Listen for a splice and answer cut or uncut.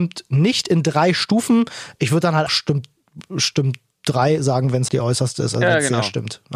cut